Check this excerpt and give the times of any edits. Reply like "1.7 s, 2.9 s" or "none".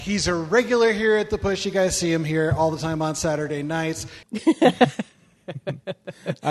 4.2 s